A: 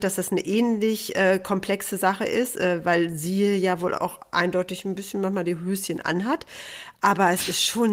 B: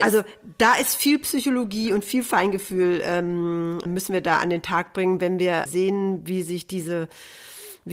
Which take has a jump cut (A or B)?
B